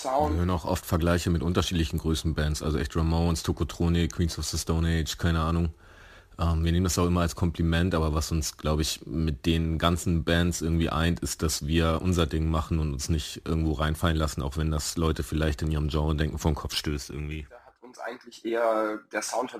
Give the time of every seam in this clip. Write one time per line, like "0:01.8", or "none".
none